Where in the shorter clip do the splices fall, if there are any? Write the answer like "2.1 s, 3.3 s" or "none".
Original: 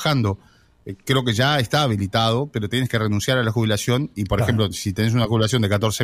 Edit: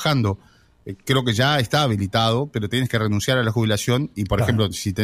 none